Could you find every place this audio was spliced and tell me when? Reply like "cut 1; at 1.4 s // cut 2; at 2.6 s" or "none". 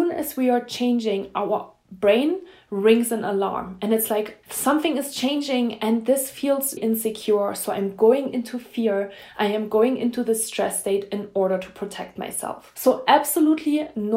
cut 1; at 4.4 s // cut 2; at 6.8 s